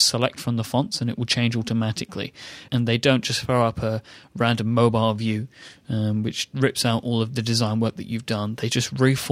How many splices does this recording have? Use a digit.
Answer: 1